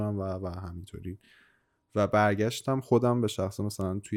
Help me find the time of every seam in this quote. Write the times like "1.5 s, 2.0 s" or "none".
none

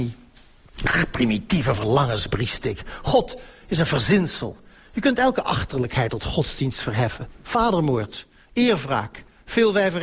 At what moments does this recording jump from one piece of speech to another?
none

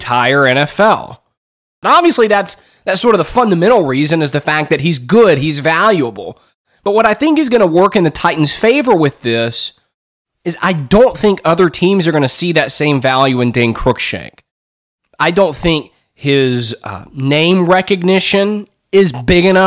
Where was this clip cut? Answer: 1.8 s

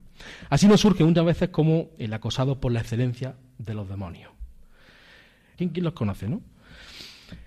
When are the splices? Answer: 5.6 s

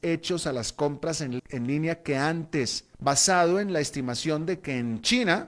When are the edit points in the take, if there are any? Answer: 1.4 s, 2.9 s

